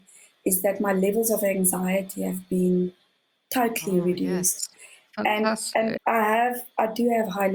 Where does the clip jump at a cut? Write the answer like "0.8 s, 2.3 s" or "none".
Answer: 6.0 s